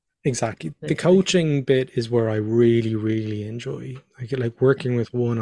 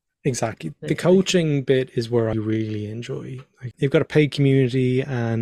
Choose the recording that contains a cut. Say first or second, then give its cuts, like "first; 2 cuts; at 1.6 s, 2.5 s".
second; 2 cuts; at 2.3 s, 3.7 s